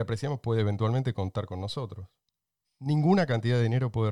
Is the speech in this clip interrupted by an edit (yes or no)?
yes